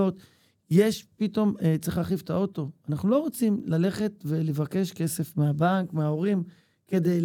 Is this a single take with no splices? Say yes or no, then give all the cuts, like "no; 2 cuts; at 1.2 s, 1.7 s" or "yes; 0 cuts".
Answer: yes; 0 cuts